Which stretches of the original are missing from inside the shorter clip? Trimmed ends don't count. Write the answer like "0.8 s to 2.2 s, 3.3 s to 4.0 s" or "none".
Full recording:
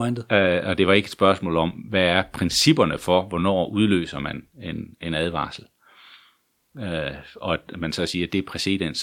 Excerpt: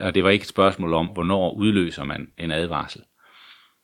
1.7 s to 3.2 s, 4.5 s to 5.0 s

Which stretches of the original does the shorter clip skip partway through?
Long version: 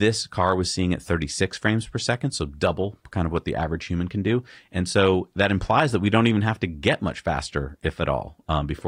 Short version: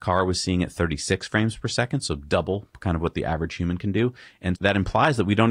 4.9 s to 5.3 s

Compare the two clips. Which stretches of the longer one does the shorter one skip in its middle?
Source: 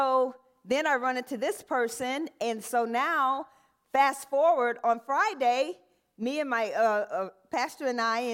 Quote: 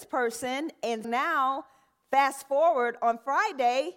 2.6 s to 2.9 s

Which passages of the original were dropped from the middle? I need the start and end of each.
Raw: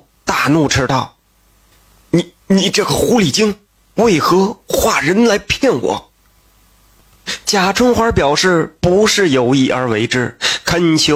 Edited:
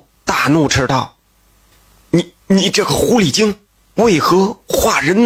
none

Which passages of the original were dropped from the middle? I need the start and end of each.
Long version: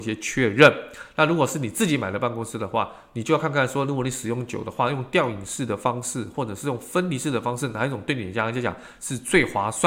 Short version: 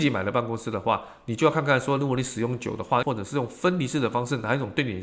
4.9 s to 6.3 s

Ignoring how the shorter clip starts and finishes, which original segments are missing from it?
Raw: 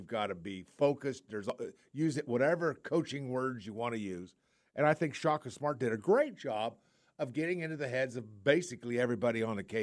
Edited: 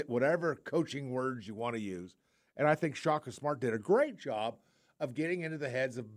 none

